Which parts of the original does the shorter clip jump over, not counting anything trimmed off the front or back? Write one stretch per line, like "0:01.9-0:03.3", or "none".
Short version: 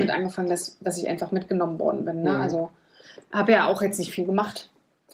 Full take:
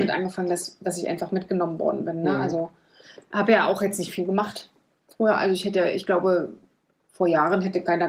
none